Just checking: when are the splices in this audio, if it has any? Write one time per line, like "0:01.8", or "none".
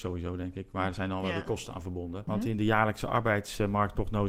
0:02.3